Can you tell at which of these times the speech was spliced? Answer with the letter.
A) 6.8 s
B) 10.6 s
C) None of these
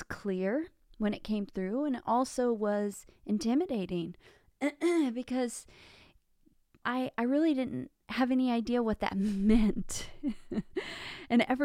A